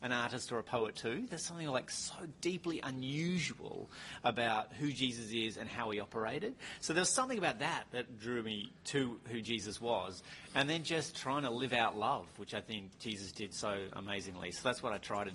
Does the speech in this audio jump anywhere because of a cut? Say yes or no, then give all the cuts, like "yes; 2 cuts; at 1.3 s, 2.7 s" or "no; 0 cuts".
no; 0 cuts